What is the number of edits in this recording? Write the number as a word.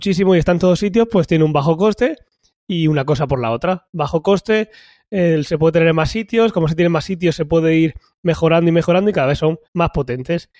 one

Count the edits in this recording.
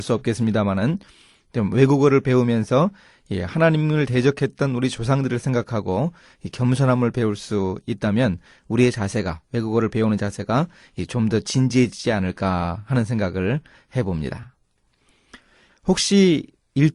one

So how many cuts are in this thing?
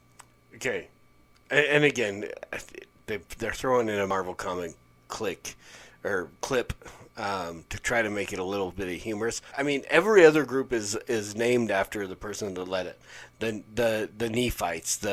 one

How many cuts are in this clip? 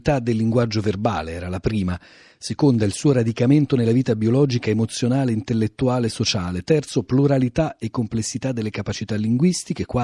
zero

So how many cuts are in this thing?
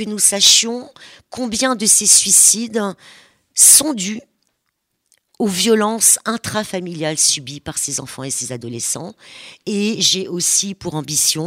zero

